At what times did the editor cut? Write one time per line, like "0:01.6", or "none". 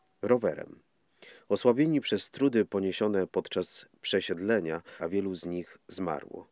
0:05.0